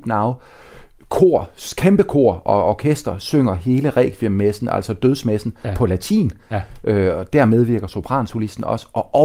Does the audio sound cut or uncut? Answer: uncut